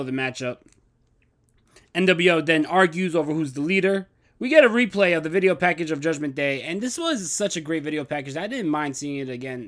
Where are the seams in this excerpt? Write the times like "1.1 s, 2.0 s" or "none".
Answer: 4.2 s